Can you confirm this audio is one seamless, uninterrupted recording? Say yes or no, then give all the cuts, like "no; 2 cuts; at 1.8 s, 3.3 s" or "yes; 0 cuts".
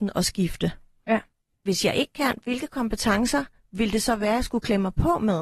no; 1 cut; at 1.5 s